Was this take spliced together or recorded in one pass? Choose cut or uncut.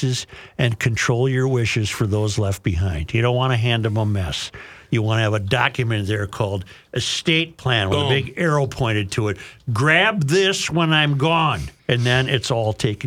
cut